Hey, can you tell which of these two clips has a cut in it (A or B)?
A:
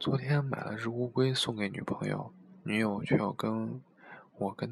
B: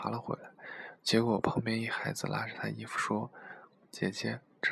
B